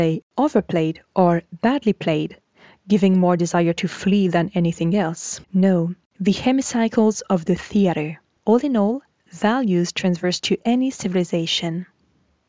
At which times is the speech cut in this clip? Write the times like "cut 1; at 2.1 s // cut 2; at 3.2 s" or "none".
cut 1; at 5.4 s // cut 2; at 8.4 s